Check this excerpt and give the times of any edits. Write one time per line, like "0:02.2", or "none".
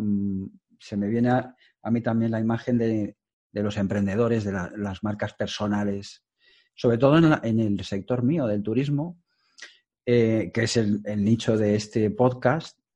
none